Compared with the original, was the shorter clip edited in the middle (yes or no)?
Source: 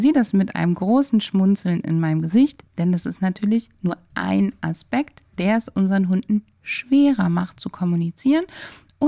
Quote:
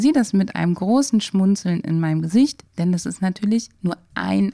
no